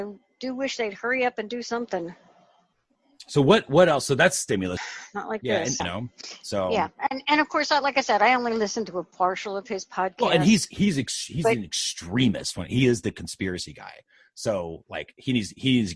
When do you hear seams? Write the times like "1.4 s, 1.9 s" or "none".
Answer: 4.8 s, 5.8 s